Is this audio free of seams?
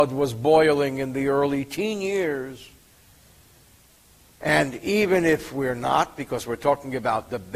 no; 1 cut; at 4.2 s

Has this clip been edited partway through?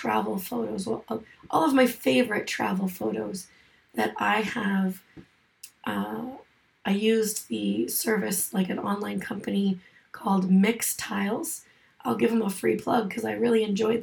no; 0 cuts

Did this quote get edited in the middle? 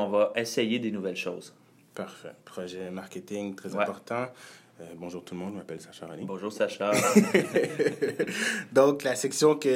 no; 0 cuts

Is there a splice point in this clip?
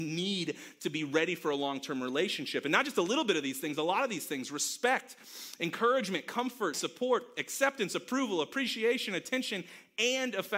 yes; 1 cut; at 6.7 s

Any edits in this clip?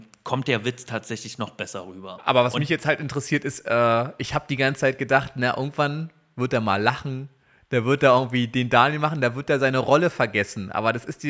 no; 0 cuts

